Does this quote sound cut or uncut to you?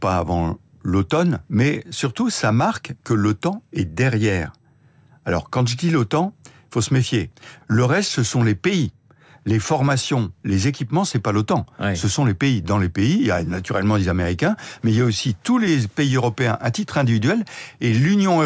cut